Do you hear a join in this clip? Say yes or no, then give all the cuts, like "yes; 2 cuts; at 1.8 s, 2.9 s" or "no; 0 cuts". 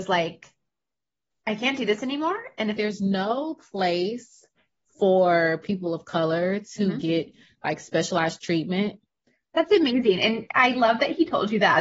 yes; 2 cuts; at 2.8 s, 9.5 s